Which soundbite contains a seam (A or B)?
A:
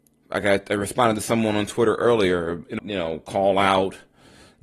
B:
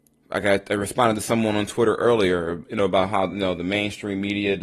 A